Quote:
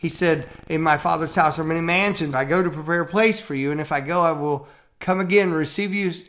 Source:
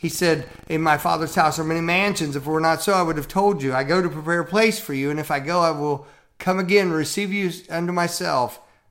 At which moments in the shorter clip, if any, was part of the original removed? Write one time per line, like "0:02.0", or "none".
0:02.3